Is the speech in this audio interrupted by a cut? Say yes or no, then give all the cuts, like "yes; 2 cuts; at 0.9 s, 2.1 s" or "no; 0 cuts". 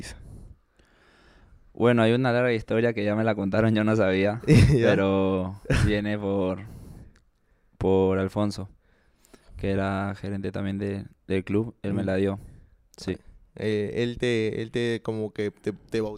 no; 0 cuts